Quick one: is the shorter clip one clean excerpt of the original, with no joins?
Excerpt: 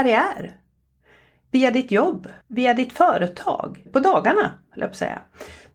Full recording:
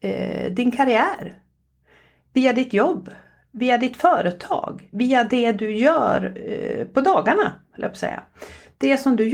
no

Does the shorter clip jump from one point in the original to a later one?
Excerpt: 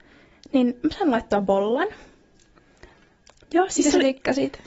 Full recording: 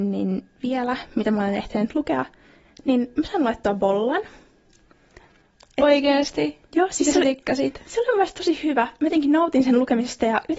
yes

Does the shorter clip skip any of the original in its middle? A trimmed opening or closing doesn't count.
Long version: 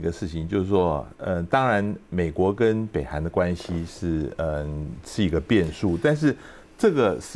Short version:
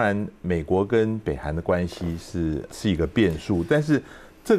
yes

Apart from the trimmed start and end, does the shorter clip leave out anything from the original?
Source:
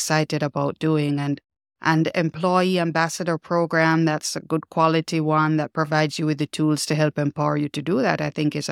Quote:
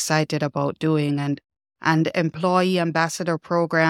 no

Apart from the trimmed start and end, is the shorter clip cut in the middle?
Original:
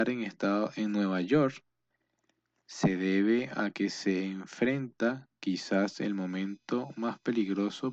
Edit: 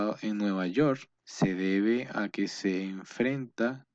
yes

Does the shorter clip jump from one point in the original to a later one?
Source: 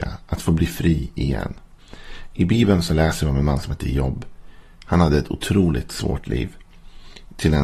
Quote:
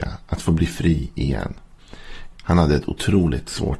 yes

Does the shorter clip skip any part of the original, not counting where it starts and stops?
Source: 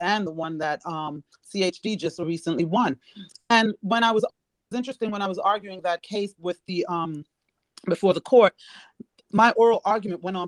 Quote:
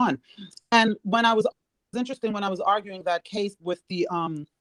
no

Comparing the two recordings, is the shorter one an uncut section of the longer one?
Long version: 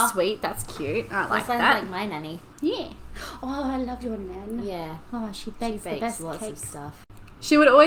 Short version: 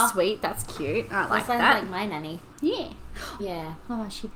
no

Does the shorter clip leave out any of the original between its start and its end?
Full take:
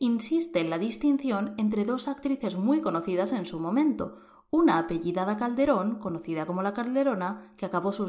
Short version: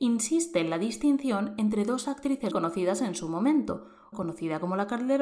yes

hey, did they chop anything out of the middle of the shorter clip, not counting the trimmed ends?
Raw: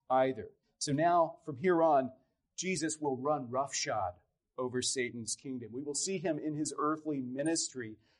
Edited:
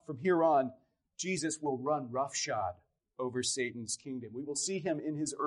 no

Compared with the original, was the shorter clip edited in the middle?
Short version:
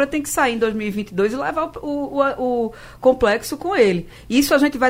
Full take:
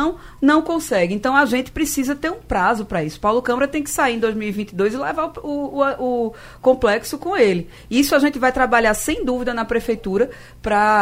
no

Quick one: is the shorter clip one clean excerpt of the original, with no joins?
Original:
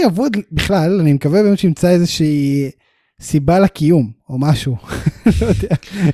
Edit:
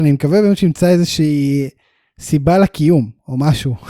yes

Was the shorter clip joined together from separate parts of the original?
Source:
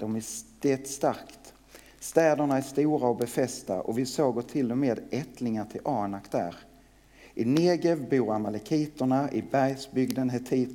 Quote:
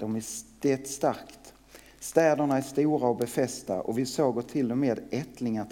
no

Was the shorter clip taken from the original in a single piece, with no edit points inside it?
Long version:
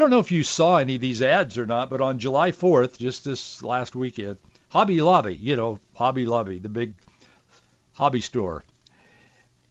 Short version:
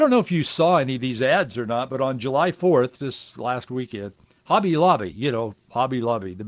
no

